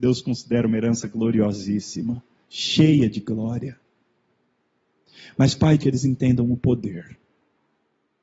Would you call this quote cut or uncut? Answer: cut